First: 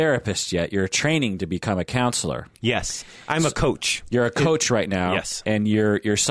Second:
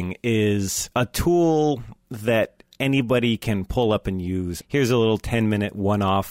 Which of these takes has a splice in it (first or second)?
second